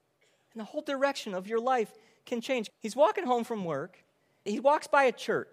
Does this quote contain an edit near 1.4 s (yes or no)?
no